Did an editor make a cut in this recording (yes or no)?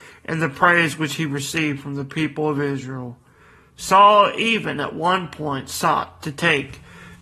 no